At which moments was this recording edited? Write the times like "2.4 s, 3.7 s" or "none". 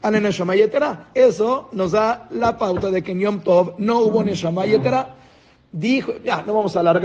1.1 s